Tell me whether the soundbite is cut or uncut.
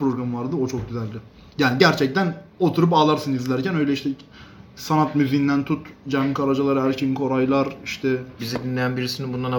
cut